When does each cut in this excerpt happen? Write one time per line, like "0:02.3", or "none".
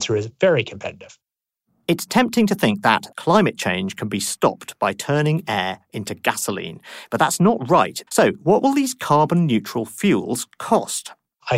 0:03.1
0:08.1